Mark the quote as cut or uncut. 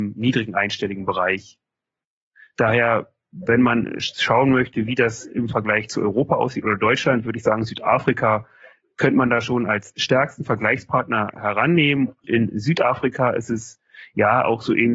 cut